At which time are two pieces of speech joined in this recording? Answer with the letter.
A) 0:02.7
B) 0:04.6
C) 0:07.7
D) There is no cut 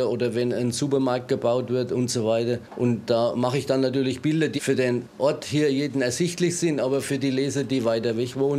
B